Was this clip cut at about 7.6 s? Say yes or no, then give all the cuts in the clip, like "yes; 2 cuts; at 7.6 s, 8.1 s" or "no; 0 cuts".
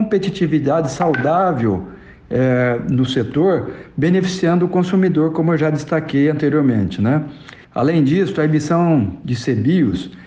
yes; 1 cut; at 7.6 s